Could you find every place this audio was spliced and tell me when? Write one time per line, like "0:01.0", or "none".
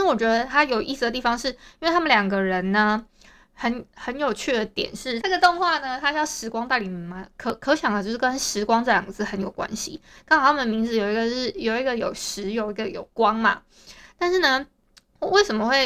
0:05.2